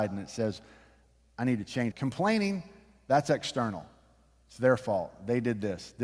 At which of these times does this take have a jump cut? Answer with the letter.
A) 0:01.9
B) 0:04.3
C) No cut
A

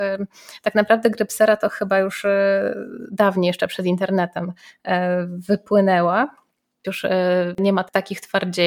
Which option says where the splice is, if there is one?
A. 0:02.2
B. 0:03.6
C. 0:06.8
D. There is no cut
C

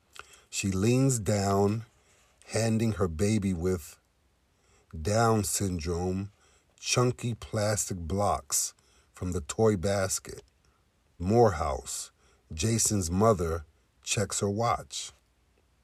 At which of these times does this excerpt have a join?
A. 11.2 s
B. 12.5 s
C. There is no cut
A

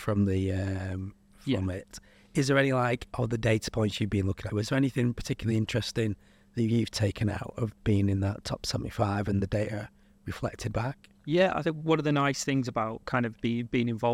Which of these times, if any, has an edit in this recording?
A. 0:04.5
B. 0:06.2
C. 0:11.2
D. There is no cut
A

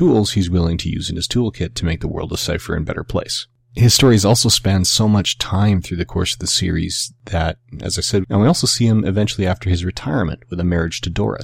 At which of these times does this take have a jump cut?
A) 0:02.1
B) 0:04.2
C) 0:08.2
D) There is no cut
C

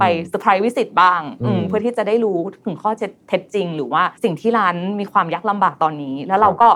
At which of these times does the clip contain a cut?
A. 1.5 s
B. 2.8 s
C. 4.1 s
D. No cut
C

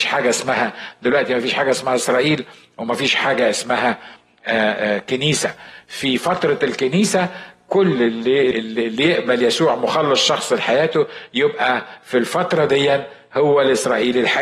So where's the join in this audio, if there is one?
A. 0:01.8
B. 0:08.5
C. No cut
B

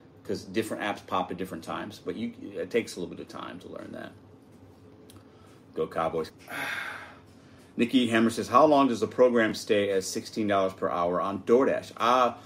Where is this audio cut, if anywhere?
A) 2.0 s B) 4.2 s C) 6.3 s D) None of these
C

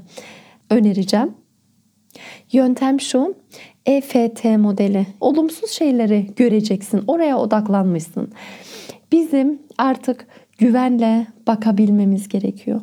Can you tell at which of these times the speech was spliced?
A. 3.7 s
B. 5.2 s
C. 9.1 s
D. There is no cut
B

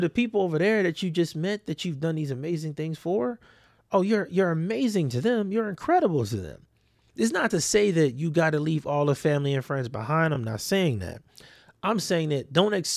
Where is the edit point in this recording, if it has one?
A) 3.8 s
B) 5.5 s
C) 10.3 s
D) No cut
D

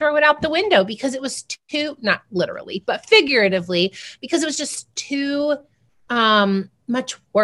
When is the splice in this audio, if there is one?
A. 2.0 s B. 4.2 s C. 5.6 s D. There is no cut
D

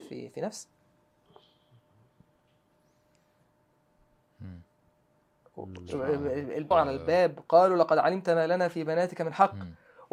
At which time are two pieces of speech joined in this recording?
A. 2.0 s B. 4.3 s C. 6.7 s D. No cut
C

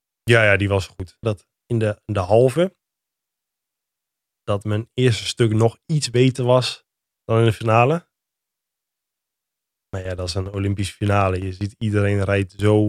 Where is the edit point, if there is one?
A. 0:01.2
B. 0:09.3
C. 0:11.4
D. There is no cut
A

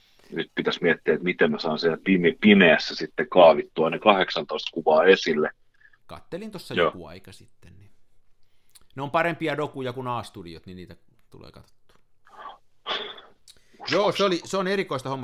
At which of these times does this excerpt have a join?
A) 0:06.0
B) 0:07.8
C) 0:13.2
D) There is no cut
A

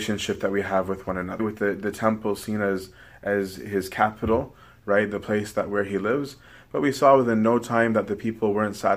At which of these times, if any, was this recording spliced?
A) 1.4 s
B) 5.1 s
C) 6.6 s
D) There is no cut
A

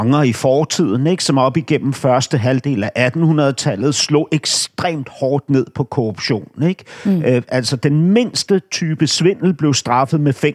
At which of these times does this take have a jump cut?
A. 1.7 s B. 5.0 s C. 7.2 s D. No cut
D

